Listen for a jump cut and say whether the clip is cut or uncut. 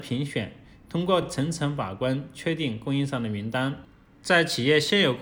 uncut